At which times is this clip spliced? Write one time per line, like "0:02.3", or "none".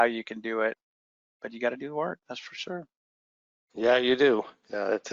none